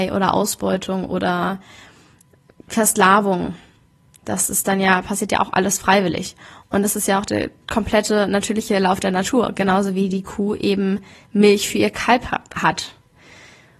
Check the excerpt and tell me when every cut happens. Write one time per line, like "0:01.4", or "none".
none